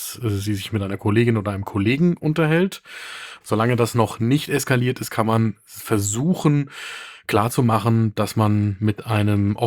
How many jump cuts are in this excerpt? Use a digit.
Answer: 1